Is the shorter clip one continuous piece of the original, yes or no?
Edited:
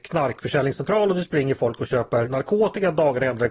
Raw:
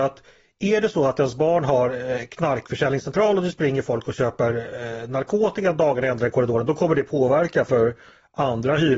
no